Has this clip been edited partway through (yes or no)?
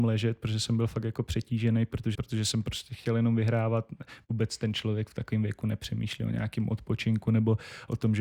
yes